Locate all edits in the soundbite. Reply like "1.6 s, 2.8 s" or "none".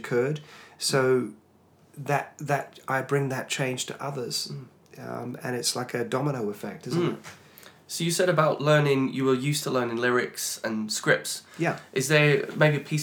none